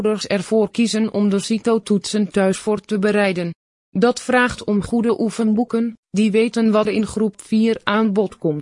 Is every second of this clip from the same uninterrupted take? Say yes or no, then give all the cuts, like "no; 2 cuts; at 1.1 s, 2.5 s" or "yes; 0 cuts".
no; 1 cut; at 6.9 s